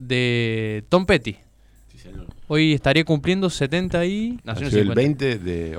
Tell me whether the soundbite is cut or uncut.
cut